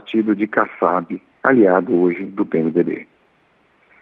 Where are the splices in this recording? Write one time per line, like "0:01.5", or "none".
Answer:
0:01.3